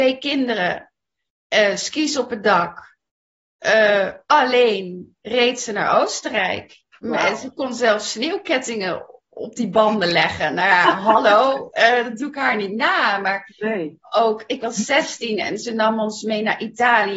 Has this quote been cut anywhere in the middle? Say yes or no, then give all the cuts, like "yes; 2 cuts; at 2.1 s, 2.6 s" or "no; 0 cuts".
no; 0 cuts